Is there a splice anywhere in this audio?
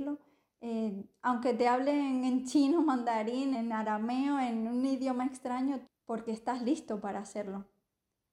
yes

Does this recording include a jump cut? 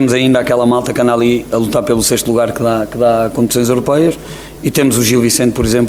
no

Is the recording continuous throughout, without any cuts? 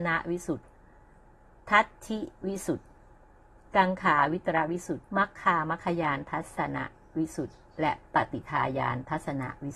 no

